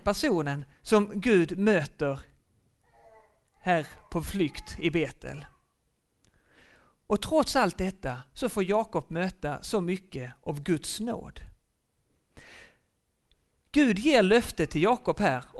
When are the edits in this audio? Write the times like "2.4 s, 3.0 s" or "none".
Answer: none